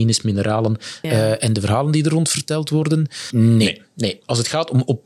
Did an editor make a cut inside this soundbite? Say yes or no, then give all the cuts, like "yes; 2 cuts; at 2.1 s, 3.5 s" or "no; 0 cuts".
yes; 2 cuts; at 1.0 s, 3.3 s